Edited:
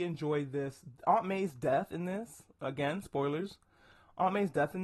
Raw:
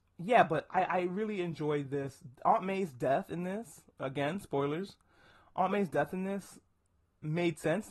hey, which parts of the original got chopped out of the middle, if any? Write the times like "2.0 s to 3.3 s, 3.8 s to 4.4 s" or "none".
none